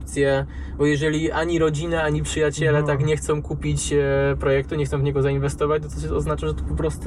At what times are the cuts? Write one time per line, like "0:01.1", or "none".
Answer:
none

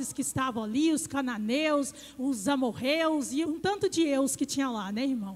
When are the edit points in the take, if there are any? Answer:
0:03.4

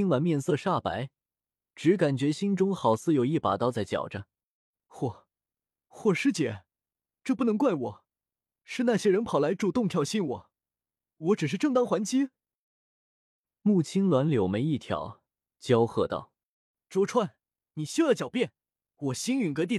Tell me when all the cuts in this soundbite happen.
none

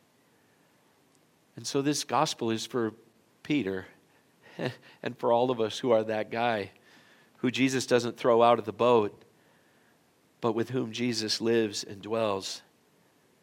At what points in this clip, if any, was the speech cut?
none

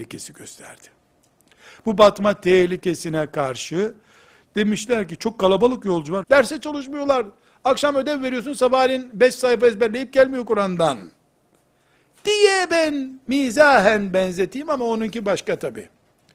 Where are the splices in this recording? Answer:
0:06.2

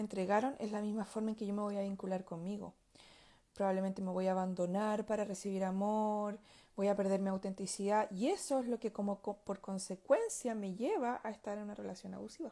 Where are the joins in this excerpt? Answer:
none

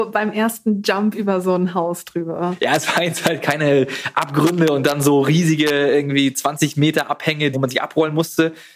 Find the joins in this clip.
0:07.5

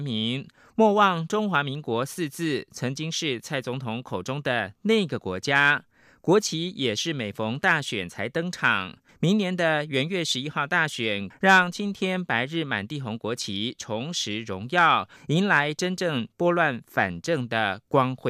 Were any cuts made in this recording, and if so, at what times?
0:09.1
0:11.3
0:15.2

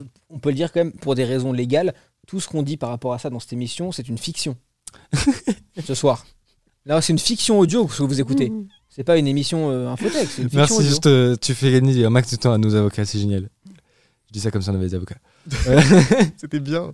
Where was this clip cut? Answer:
0:01.0

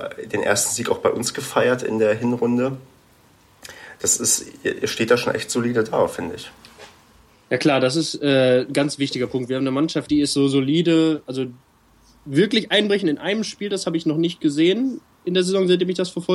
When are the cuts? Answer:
none

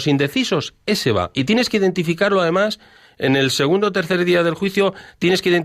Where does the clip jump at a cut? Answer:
none

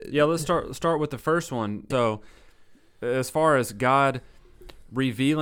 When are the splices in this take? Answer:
0:01.9

